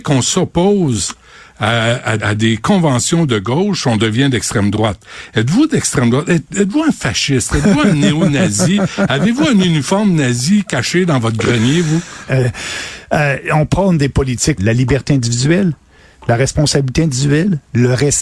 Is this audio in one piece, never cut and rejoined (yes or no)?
no